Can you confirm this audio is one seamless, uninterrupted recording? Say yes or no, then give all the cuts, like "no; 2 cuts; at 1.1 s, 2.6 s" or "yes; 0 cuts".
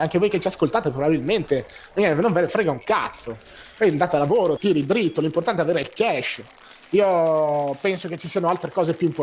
no; 1 cut; at 4.6 s